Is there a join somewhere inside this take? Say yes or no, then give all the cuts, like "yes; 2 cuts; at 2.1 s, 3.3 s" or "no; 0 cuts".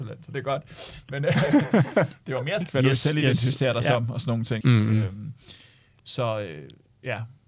yes; 2 cuts; at 2.6 s, 4.6 s